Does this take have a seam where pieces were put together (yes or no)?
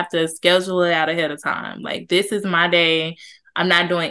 no